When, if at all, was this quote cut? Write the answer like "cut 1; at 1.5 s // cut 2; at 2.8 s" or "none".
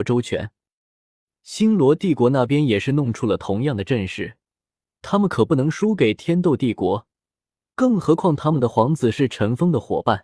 none

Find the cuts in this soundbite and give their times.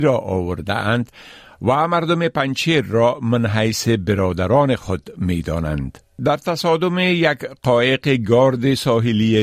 cut 1; at 6.2 s

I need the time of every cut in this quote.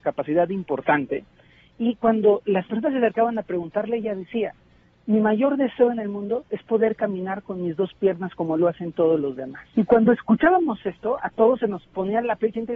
cut 1; at 9.7 s

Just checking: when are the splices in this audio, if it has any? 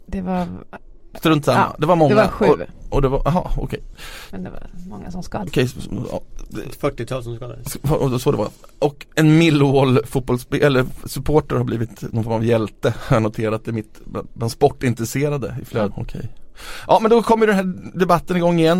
cut 1; at 5.5 s // cut 2; at 15.9 s

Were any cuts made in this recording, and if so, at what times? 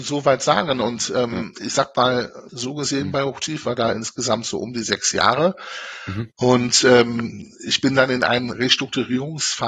cut 1; at 2.5 s

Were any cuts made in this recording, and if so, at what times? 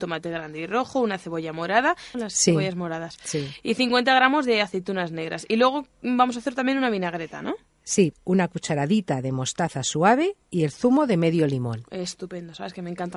cut 1; at 2.1 s // cut 2; at 8.1 s

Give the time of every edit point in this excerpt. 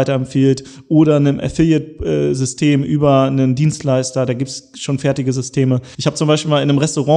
cut 1; at 5.9 s

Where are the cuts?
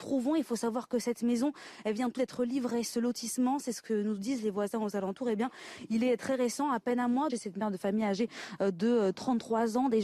cut 1; at 2.2 s // cut 2; at 7.3 s

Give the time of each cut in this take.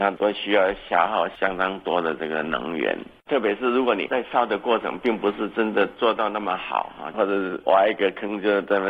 cut 1; at 7.1 s

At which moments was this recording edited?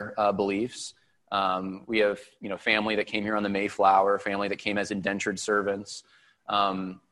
none

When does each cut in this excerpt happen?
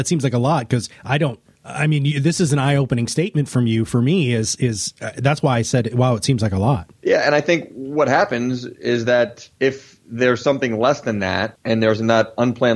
none

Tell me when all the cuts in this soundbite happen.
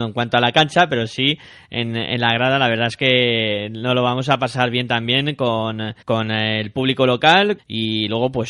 cut 1; at 6.0 s // cut 2; at 7.6 s

